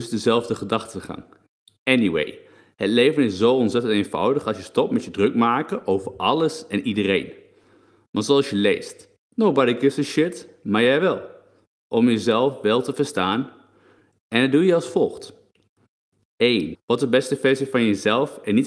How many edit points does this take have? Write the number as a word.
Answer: one